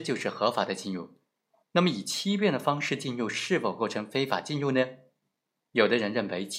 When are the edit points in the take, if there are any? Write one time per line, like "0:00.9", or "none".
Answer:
0:01.6

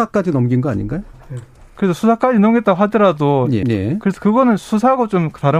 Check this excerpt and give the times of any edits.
0:03.6

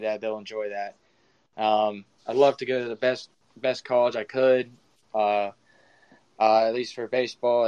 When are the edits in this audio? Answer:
0:02.2

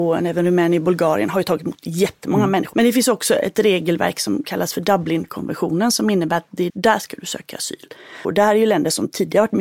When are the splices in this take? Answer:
0:02.7
0:06.7
0:08.2

